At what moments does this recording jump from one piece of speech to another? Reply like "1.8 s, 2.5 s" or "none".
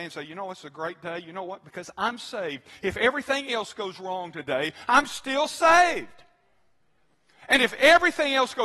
none